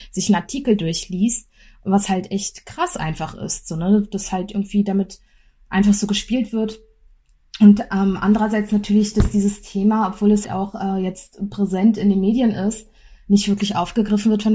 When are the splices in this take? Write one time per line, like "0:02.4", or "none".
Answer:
0:10.4

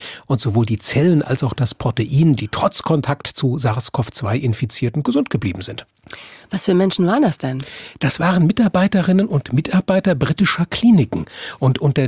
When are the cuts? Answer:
0:02.4

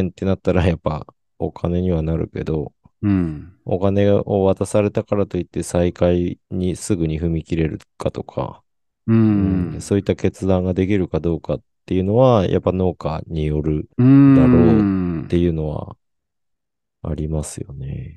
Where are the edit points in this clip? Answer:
0:06.4
0:13.9

